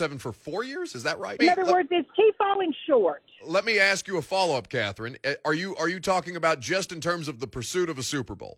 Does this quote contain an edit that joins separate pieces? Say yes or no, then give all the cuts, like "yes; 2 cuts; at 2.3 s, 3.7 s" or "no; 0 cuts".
yes; 1 cut; at 1.4 s